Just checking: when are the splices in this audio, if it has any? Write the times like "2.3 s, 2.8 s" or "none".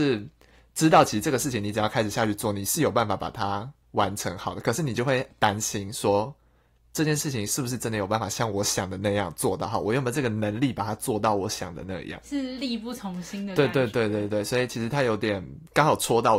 none